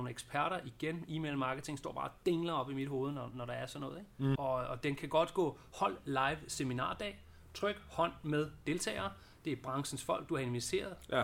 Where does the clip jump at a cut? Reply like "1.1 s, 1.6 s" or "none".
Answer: 4.4 s